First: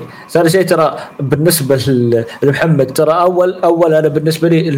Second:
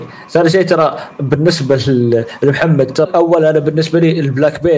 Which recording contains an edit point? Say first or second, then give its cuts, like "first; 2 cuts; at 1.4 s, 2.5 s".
second; 1 cut; at 3.0 s